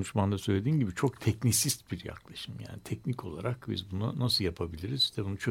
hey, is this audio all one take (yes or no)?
yes